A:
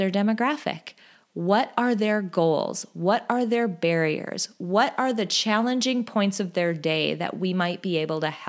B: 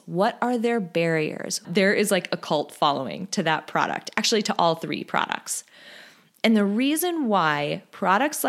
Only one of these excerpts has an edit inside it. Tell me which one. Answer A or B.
B